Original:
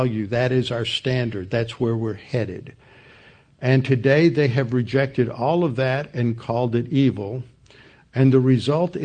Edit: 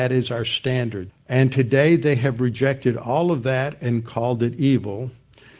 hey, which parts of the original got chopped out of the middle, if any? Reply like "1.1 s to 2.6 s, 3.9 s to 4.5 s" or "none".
1.5 s to 3.4 s

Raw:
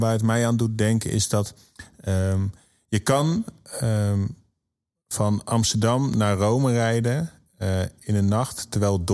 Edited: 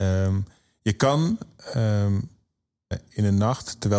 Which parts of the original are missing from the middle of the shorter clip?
5.0 s to 7.8 s

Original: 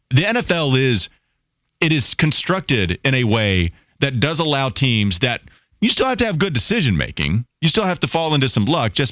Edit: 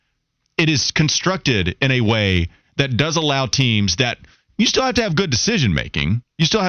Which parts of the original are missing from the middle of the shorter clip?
none

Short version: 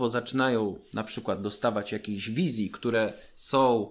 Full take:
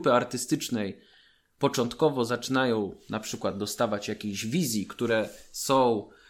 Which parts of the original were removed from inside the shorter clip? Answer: none

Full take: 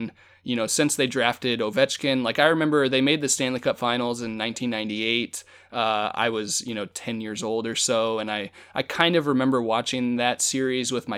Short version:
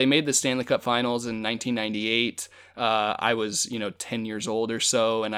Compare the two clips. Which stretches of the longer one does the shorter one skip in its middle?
none

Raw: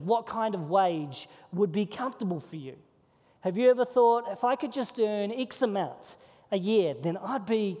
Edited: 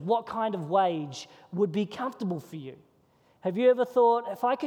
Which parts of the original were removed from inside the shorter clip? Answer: none

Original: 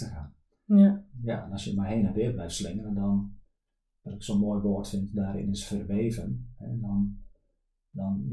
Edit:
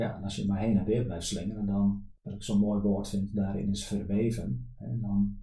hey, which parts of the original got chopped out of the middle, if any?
3.5 s to 4.0 s

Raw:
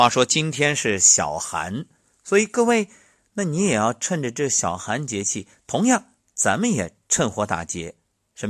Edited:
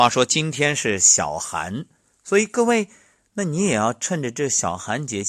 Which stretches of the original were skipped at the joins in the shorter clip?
none

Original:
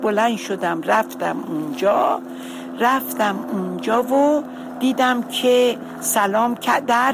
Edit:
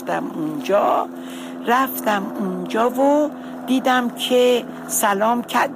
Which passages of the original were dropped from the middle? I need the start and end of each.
none

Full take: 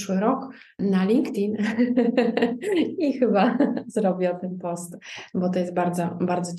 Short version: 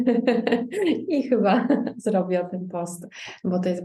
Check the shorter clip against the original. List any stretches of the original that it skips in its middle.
none

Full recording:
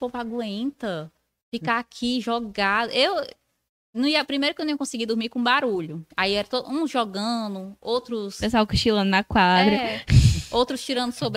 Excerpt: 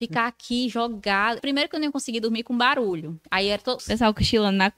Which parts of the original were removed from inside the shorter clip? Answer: 2.9 s to 4.2 s, 6.6 s to 8.3 s

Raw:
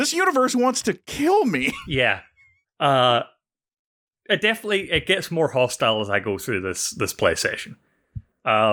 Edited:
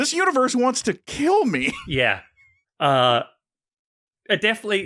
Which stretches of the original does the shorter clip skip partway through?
none

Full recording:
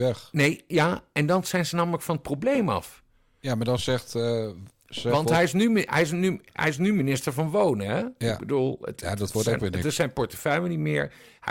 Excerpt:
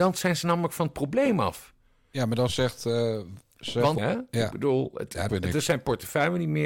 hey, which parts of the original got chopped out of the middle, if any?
5.3 s to 7.9 s, 9.2 s to 9.6 s

